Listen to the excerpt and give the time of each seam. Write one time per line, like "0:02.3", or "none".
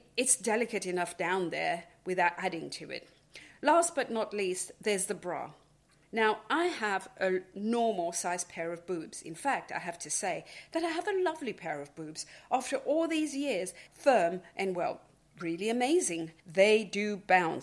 0:13.9
0:16.4